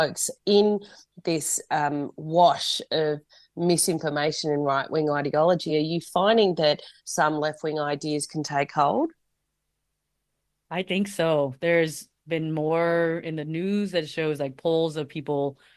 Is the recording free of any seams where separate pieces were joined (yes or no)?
yes